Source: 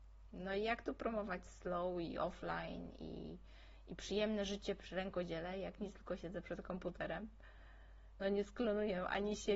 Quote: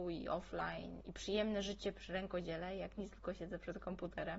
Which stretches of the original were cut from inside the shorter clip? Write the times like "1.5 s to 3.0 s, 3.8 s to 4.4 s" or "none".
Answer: 2.9 s to 3.8 s